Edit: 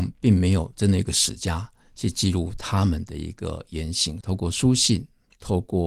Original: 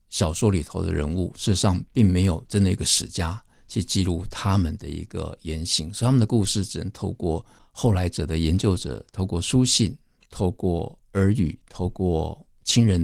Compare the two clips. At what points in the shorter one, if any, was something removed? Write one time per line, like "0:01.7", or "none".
0:04.2